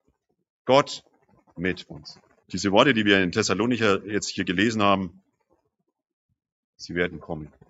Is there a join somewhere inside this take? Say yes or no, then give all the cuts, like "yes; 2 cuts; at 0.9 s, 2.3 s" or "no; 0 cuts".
yes; 1 cut; at 2.4 s